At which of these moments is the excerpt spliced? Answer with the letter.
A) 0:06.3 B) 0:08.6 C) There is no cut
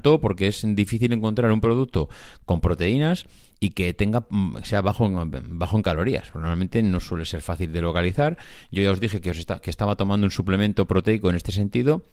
C